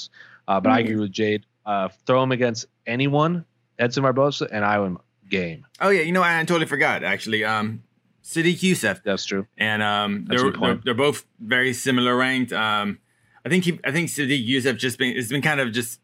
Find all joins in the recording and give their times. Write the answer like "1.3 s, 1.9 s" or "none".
9.0 s